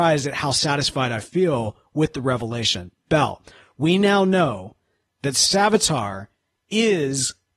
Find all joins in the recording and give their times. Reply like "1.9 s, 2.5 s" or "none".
none